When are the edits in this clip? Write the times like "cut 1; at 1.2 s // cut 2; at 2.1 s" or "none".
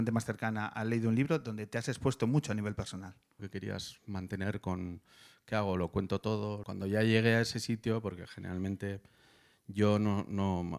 cut 1; at 3.4 s // cut 2; at 6.6 s

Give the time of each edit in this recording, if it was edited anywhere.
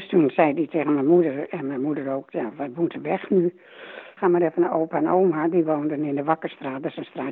cut 1; at 4.2 s

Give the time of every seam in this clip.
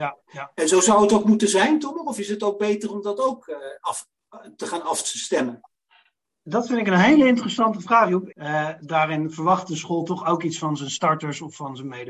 cut 1; at 8.3 s

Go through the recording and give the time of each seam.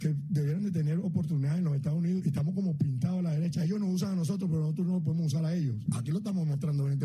cut 1; at 2.2 s // cut 2; at 5.9 s

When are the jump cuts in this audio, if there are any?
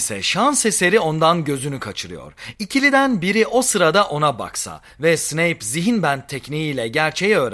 none

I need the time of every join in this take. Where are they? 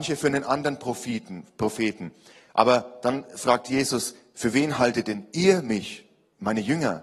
none

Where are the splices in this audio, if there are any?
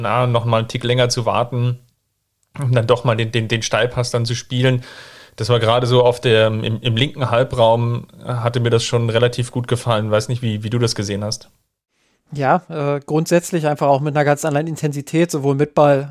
none

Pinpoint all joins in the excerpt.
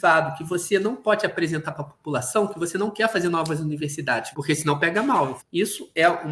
cut 1; at 4.3 s // cut 2; at 5.4 s

